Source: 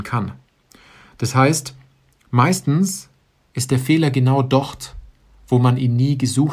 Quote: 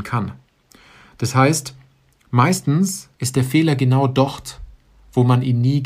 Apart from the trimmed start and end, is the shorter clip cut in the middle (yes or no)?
yes